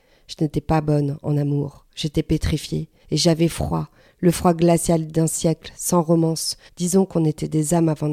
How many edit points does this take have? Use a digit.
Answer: 2